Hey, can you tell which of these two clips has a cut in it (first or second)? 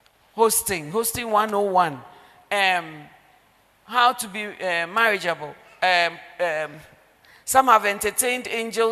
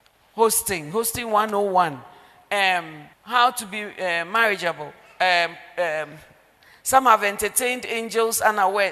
second